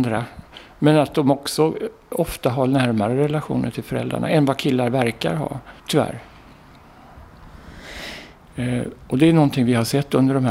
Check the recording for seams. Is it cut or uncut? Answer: cut